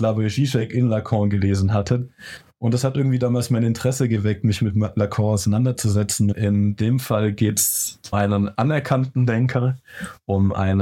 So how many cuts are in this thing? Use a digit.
2